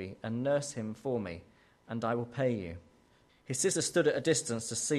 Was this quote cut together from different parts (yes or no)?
yes